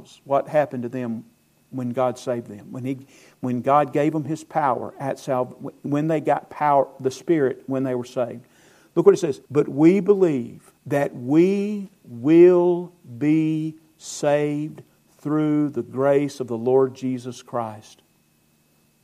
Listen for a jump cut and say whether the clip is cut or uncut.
cut